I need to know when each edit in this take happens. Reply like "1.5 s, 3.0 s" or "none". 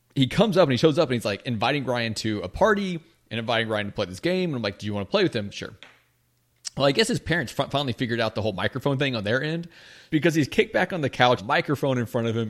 10.1 s, 11.4 s